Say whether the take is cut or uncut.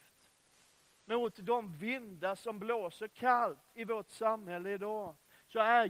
cut